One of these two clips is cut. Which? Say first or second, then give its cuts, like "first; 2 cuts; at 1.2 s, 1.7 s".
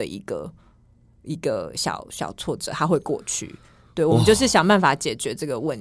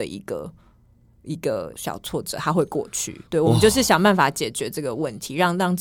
second; 2 cuts; at 1.7 s, 3.3 s